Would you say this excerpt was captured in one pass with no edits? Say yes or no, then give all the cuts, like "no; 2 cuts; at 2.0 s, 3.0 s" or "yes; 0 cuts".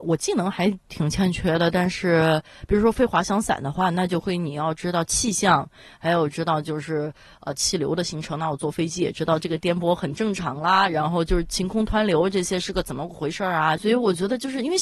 no; 1 cut; at 13.8 s